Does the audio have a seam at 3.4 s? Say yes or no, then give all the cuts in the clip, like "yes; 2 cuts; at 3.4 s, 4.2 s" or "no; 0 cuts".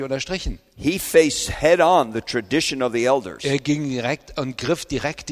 no; 0 cuts